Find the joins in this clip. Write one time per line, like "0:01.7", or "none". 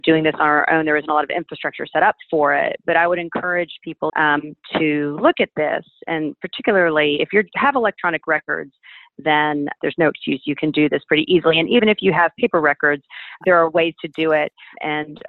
0:04.1